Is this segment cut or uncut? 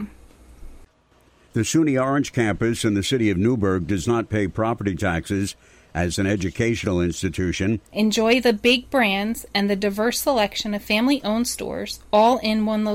cut